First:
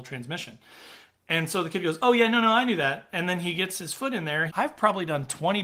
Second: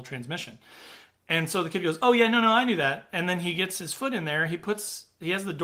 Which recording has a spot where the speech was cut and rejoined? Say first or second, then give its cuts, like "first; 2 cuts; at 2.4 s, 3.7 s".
first; 1 cut; at 4.5 s